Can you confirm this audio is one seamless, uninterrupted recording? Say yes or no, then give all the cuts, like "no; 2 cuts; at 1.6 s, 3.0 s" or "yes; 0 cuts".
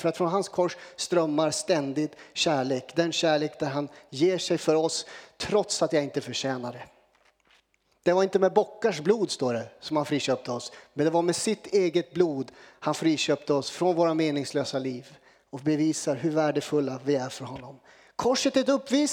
yes; 0 cuts